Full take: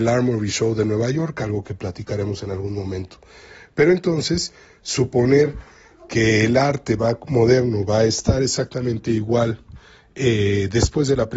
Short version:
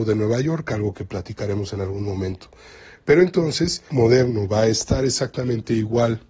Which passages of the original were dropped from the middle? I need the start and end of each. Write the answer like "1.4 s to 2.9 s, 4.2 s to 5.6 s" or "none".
4.6 s to 7.3 s